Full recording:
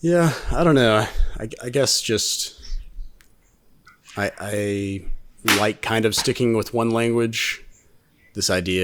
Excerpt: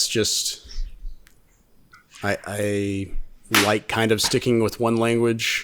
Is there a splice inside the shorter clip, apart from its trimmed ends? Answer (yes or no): no